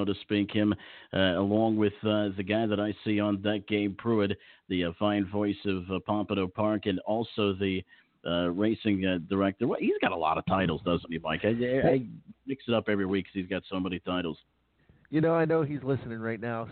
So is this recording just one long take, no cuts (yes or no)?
yes